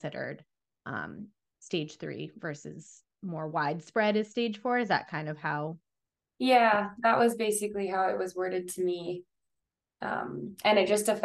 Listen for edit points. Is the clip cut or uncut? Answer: uncut